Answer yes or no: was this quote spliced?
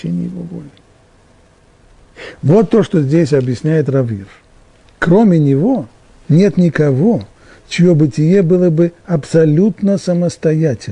yes